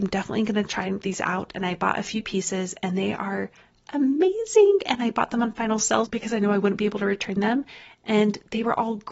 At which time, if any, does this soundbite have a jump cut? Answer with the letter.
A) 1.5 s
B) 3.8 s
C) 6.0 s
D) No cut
C